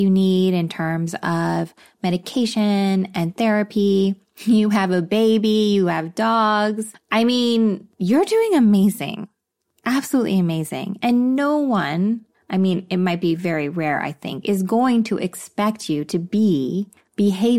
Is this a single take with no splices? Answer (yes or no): yes